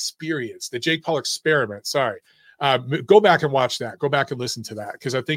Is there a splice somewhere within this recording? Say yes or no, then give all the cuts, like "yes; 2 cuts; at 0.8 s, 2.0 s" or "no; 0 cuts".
no; 0 cuts